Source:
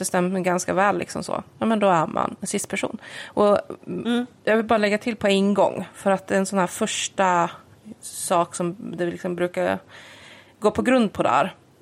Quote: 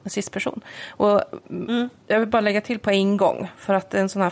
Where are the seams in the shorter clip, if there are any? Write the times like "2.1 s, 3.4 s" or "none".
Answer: none